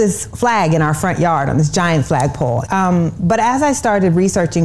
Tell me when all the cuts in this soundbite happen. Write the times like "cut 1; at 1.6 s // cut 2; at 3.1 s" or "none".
cut 1; at 2.7 s